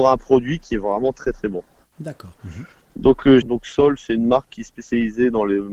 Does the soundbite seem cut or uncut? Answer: cut